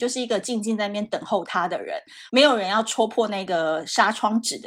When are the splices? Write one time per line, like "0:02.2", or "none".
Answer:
0:02.3

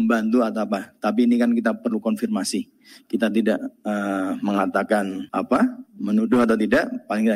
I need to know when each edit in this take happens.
0:05.3

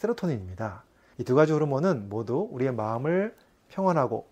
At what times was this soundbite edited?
0:01.1

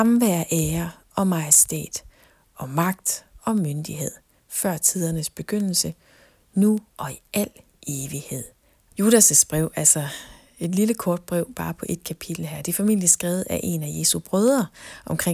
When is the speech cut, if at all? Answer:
0:08.9

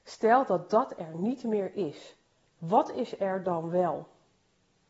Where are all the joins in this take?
none

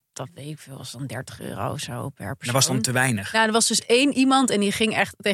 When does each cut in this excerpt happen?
none

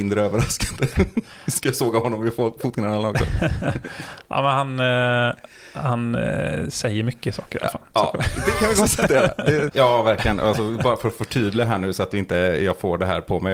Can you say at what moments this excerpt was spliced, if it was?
0:09.7

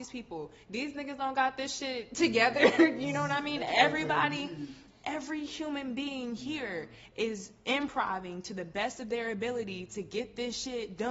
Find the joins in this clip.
none

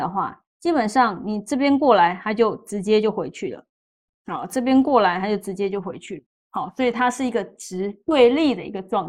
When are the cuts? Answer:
none

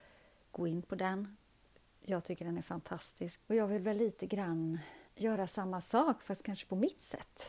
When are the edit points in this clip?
0:03.4
0:05.1

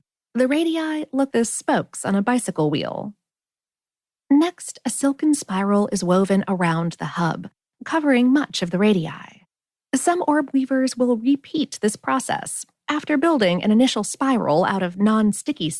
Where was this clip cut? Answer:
0:01.3

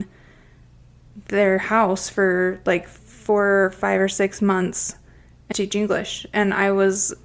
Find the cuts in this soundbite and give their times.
0:05.5

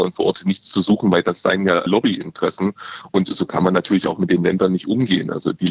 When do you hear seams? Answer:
none

